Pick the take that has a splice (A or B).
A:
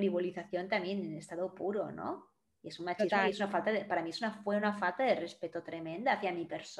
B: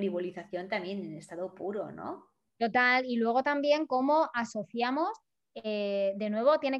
B